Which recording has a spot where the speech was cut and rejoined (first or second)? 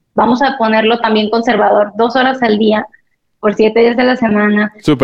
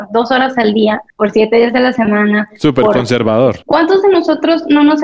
second